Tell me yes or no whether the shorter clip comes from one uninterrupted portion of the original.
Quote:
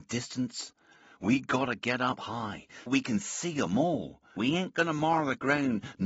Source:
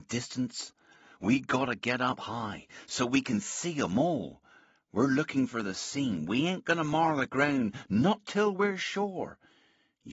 no